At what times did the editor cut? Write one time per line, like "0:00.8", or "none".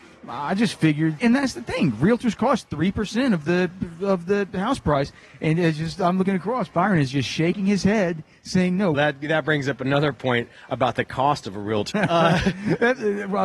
0:01.2
0:08.9
0:11.9